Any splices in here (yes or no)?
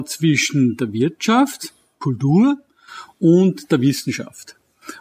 no